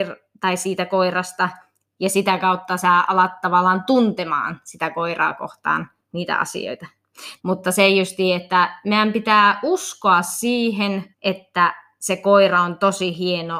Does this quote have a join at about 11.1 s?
yes; 2 cuts; at 7.4 s, 11.1 s

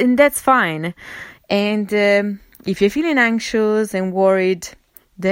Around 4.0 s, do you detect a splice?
no; 1 cut; at 1.4 s

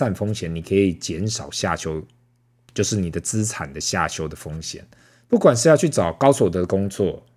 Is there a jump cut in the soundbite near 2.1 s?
no; 1 cut; at 5.2 s

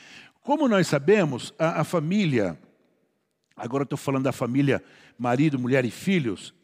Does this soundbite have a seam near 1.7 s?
no; 0 cuts

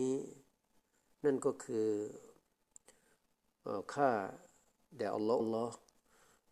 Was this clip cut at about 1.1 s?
no; 1 cut; at 5.4 s

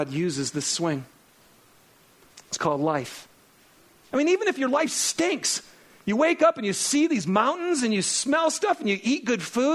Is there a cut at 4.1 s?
yes; 1 cut; at 4.1 s

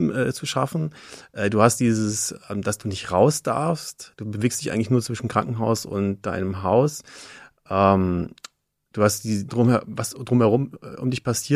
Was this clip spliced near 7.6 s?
no; 1 cut; at 9.5 s

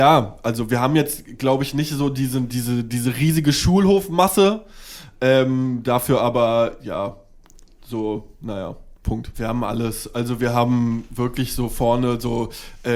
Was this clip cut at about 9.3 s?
yes; 1 cut; at 9.3 s

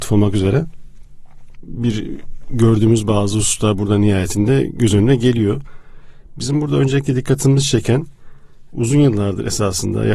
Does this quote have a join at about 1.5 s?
yes; 1 cut; at 1.5 s

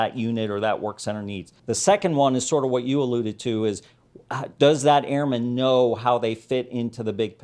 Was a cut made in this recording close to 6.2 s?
no; 1 cut; at 1.6 s

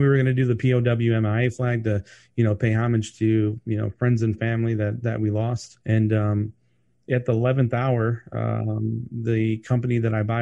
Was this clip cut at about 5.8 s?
yes; 1 cut; at 5.8 s

